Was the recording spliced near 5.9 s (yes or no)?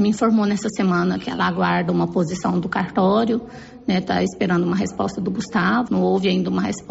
yes